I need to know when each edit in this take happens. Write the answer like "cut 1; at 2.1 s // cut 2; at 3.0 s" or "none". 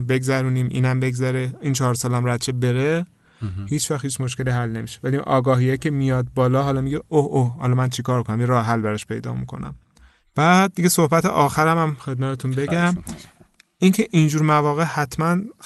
none